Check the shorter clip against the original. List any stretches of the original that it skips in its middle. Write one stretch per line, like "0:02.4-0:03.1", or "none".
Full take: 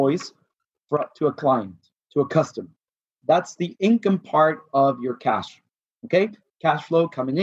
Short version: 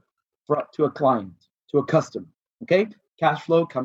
0:02.9-0:05.9